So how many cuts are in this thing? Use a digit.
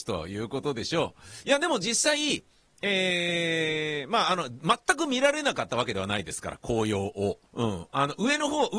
1